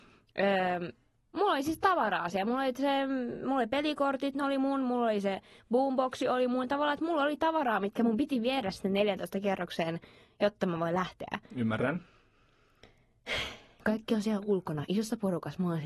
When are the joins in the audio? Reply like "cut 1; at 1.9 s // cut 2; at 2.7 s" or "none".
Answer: none